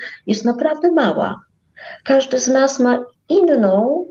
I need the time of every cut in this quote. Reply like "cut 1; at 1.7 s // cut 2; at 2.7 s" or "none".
none